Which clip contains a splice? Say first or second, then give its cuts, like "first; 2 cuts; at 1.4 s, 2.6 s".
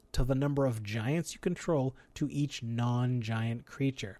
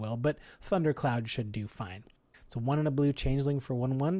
second; 1 cut; at 2.3 s